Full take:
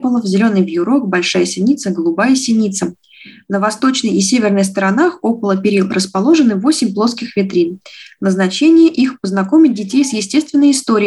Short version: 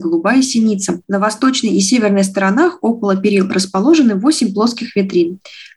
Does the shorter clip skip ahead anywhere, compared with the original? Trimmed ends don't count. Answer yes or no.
yes